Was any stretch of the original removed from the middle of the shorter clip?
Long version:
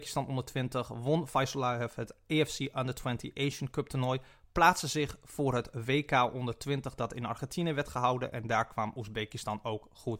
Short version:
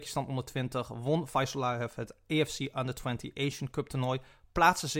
no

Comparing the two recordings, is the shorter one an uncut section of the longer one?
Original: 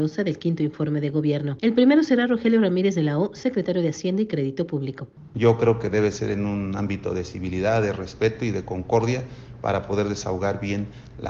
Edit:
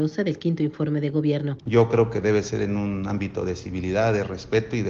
no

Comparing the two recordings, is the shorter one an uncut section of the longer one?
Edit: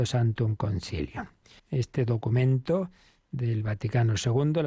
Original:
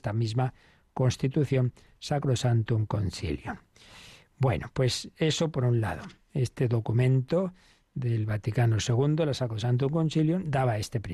no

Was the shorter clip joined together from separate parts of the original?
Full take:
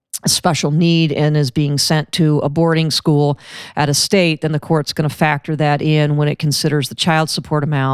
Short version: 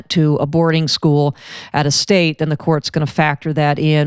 no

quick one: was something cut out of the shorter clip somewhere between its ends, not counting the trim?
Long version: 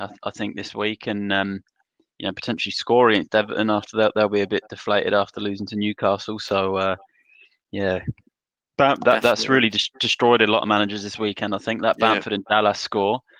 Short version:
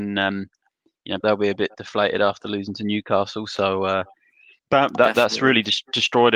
yes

